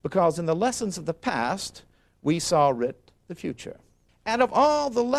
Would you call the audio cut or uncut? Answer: cut